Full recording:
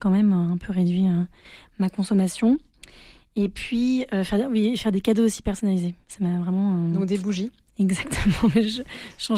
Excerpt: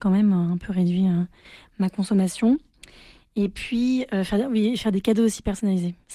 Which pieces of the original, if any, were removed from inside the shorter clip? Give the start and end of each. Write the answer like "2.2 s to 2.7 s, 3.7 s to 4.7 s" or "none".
none